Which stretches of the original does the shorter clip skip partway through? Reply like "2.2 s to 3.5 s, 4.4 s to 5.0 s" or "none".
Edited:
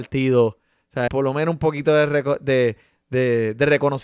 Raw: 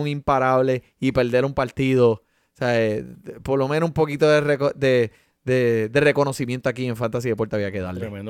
2.7 s to 3.4 s